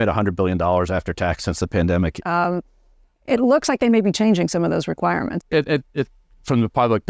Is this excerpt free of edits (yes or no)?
no